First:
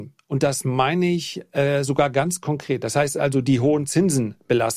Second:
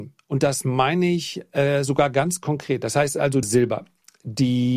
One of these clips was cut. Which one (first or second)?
second